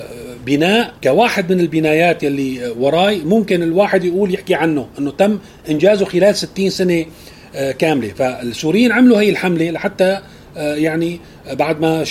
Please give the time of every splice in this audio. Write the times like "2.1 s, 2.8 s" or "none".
1.0 s